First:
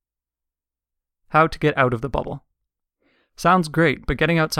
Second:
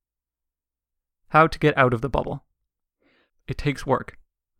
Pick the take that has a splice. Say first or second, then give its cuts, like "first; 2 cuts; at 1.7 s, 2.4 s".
second; 1 cut; at 3.3 s